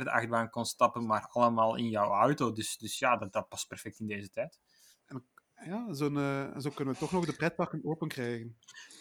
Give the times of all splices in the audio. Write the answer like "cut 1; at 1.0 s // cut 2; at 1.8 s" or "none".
cut 1; at 2.8 s // cut 2; at 5.0 s